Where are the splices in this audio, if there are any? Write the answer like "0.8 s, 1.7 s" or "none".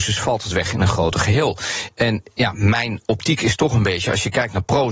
none

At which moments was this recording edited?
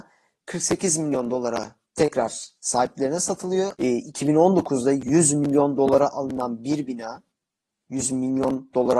3.7 s

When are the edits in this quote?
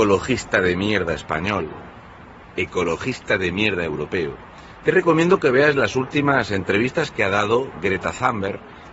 none

